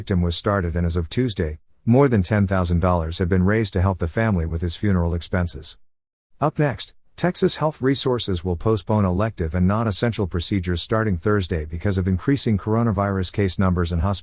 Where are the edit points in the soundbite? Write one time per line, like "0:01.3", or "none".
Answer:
none

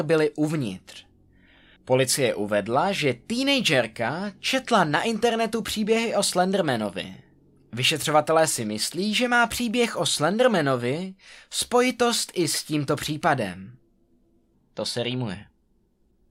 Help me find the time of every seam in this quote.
0:14.5

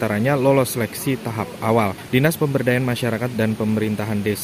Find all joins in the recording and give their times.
0:02.1

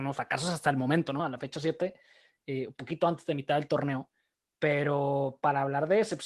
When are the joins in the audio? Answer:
none

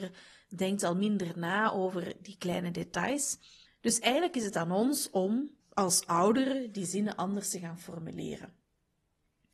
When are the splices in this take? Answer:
0:03.7
0:05.6

